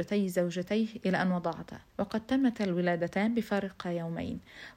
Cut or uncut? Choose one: cut